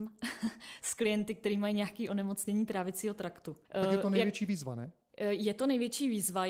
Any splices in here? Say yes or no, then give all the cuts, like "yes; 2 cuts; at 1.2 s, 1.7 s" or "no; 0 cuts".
yes; 1 cut; at 3.6 s